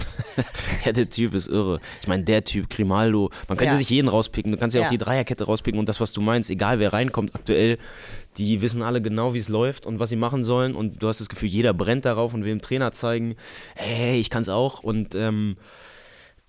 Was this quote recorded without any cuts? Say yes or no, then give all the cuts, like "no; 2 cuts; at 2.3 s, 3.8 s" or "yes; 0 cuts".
yes; 0 cuts